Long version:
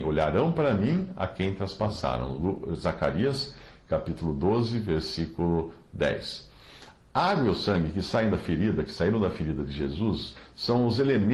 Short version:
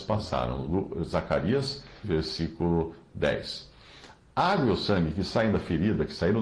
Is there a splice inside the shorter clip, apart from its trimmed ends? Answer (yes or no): yes